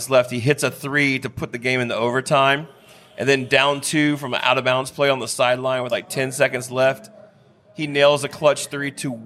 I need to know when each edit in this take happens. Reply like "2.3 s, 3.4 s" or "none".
none